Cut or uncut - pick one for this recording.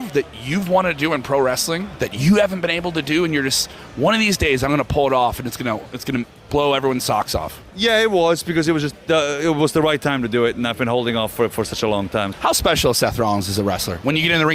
cut